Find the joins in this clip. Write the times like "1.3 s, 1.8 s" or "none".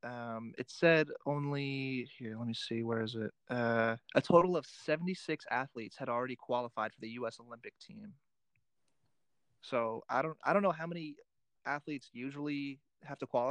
4.0 s